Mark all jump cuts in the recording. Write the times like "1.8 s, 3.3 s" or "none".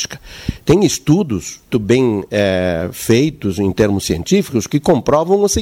1.7 s